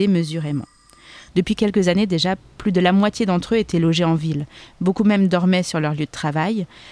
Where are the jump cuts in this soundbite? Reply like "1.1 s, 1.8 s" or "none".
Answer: 1.3 s